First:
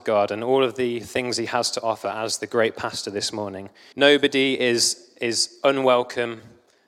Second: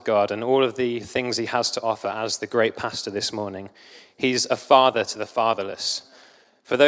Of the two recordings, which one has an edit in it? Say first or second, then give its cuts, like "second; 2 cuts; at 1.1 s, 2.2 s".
first; 1 cut; at 3.9 s